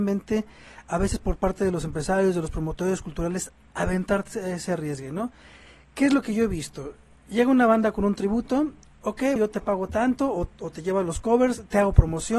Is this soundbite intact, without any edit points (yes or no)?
no